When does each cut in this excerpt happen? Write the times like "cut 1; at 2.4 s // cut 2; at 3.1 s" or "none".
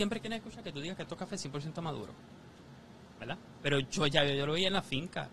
cut 1; at 3.6 s